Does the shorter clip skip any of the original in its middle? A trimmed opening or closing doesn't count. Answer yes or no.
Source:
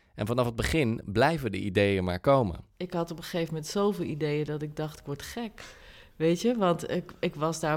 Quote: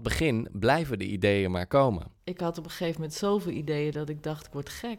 no